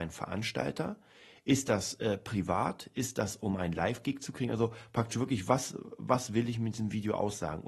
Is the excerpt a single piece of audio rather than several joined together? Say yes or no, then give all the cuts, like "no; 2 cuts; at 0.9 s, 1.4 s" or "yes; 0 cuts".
yes; 0 cuts